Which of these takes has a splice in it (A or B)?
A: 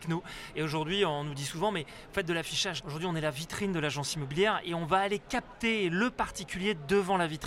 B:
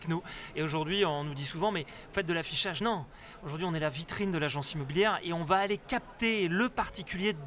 A